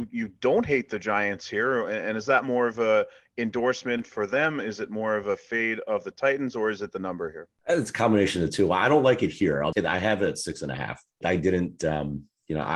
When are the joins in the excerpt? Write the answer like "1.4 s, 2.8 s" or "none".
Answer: 9.7 s, 11.2 s